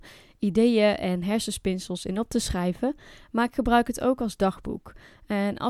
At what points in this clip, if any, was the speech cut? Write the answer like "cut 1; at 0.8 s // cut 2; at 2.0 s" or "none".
none